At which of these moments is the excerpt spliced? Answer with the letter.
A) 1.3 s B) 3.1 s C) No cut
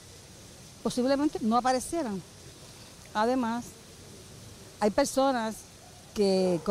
A